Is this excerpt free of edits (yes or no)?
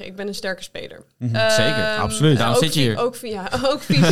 yes